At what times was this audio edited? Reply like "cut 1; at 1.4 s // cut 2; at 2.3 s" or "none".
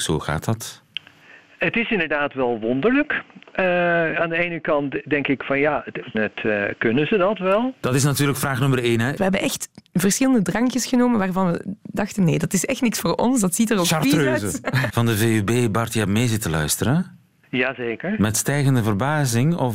cut 1; at 6.1 s // cut 2; at 9.2 s // cut 3; at 14.9 s